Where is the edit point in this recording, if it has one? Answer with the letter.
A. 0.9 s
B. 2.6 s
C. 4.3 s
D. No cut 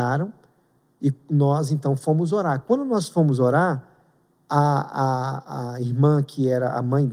D